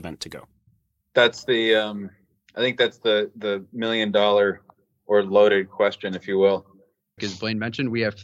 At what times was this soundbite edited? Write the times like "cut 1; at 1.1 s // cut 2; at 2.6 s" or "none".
cut 1; at 7.2 s